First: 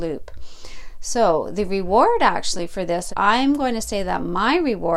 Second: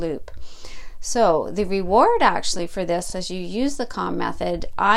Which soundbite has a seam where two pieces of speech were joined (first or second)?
first